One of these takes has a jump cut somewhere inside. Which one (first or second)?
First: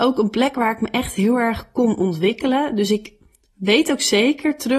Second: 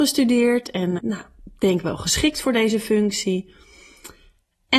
second